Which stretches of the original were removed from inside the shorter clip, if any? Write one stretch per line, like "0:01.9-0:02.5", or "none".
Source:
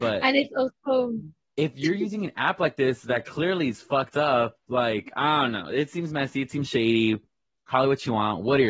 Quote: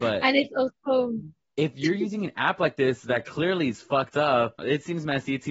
0:04.6-0:05.7